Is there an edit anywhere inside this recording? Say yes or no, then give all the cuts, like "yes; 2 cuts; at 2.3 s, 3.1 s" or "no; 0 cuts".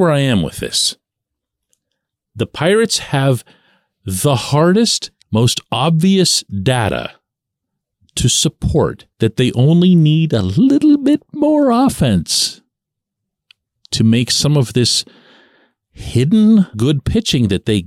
yes; 3 cuts; at 5.2 s, 9.1 s, 16.7 s